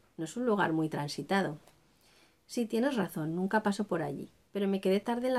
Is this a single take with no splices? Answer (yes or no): yes